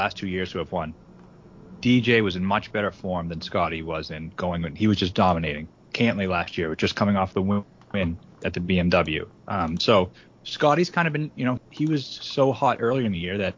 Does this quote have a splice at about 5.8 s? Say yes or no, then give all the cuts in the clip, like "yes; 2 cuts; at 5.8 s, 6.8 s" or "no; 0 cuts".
no; 1 cut; at 11.6 s